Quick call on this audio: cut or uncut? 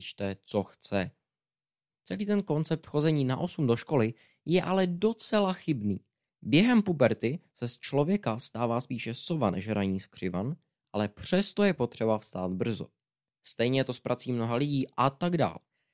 cut